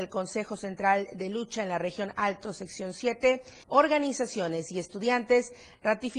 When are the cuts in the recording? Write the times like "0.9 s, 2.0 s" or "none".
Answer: 3.6 s